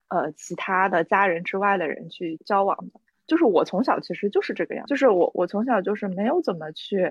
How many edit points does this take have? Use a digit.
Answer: 2